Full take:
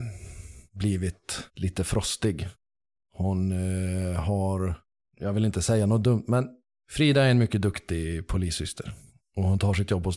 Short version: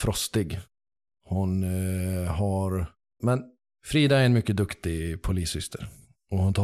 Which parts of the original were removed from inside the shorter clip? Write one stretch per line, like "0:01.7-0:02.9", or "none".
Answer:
0:05.1-0:06.3

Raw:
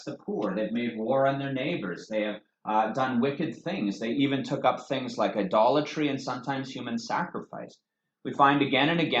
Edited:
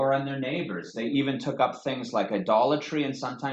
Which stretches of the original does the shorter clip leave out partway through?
0:02.1-0:04.0

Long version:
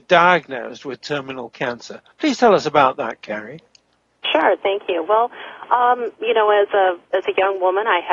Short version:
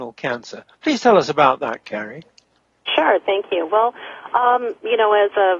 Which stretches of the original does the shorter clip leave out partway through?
none

